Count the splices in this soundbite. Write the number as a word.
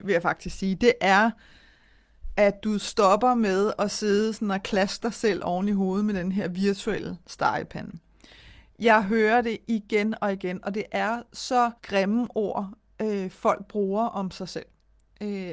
two